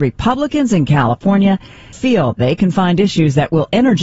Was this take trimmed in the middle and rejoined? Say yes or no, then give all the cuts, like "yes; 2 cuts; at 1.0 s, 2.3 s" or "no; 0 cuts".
yes; 1 cut; at 1.9 s